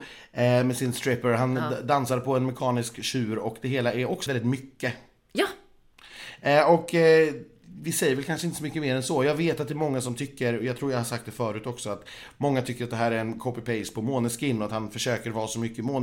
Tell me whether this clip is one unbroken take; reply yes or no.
no